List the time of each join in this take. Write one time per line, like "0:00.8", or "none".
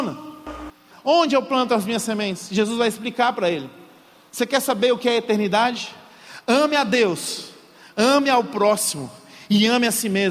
0:00.9